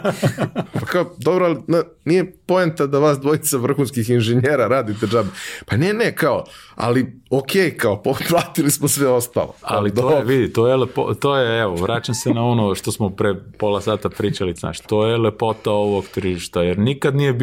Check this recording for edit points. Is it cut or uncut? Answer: cut